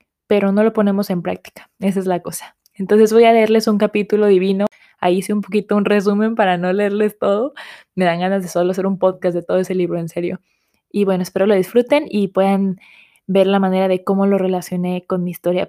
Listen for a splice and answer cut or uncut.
uncut